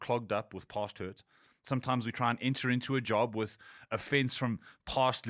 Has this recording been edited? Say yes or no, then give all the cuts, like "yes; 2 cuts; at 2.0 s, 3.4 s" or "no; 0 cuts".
no; 0 cuts